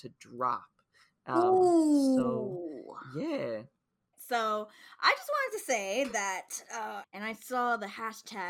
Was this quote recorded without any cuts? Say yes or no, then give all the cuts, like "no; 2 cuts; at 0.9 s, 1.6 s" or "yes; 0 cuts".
no; 2 cuts; at 4.1 s, 7.0 s